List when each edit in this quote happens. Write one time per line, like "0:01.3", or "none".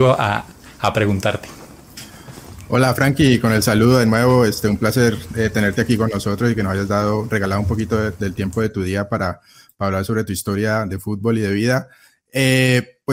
none